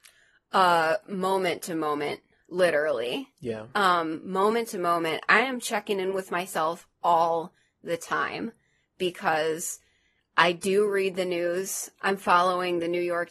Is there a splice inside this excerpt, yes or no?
no